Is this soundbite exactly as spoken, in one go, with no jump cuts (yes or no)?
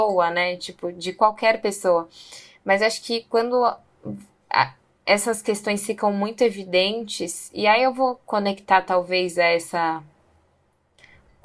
yes